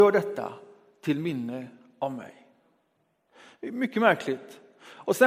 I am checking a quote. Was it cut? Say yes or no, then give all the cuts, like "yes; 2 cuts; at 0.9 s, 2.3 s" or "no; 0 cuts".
no; 0 cuts